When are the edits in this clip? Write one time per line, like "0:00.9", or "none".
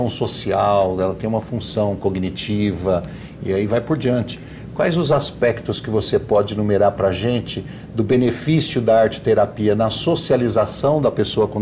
none